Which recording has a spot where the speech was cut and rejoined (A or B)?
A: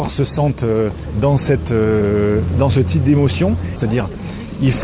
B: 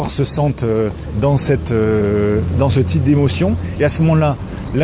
A